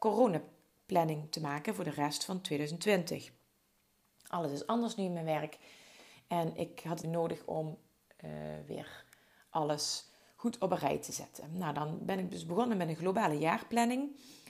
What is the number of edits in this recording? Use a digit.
1